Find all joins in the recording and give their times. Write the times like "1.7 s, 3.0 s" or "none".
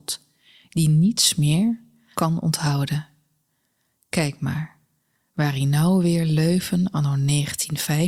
2.1 s

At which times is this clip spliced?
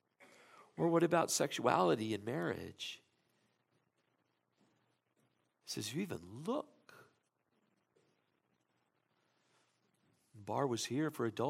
none

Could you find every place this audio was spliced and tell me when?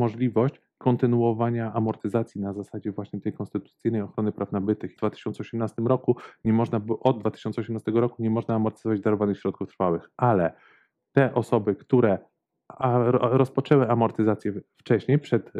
5.0 s

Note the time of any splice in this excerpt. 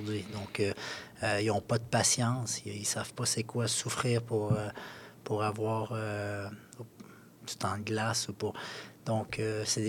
none

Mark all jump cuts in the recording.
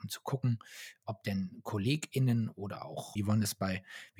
3.2 s

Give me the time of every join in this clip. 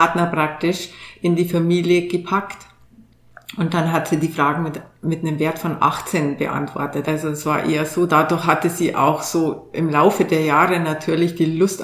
7.0 s, 8.1 s

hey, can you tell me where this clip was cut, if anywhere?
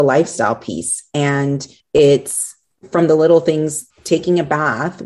1.8 s, 3.9 s

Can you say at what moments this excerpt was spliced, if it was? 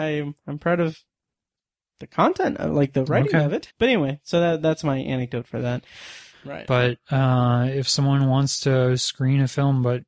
3.7 s, 6.3 s

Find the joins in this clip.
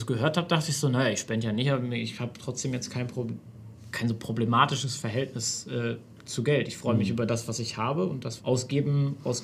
8.4 s

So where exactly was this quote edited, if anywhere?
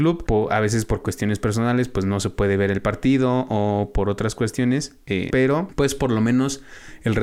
5.3 s

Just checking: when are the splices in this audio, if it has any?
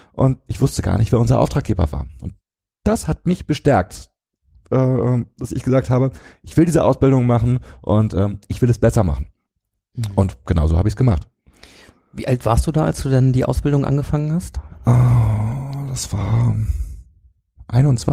none

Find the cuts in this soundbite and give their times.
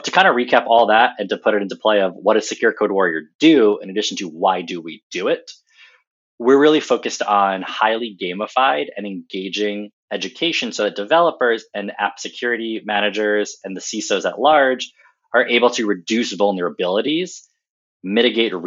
10.0 s

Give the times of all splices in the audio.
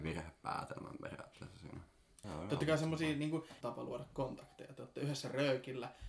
2.2 s, 3.6 s

